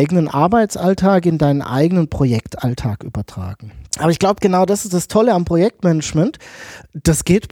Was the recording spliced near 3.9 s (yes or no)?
yes